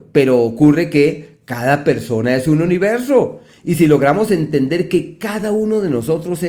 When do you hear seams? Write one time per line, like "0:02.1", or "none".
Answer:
none